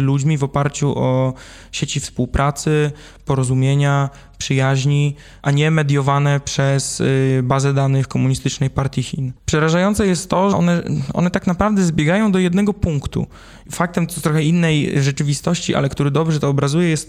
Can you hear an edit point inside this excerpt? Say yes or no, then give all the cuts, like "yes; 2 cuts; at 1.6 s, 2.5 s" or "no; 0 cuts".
yes; 2 cuts; at 9.4 s, 10.5 s